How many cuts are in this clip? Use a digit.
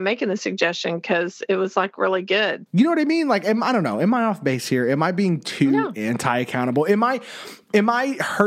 1